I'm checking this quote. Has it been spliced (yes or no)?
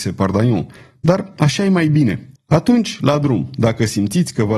yes